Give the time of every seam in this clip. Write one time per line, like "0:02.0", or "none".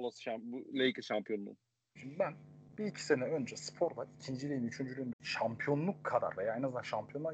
0:02.0
0:05.1